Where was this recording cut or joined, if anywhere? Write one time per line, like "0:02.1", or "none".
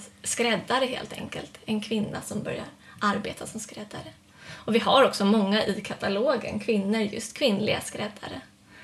none